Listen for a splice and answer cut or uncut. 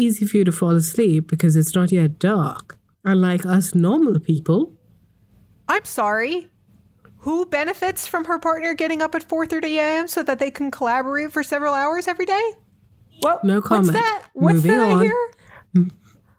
uncut